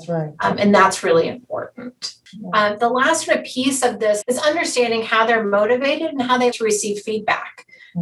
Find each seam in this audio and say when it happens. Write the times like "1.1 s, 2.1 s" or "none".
4.2 s, 6.5 s